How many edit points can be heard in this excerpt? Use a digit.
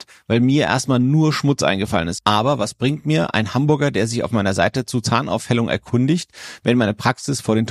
1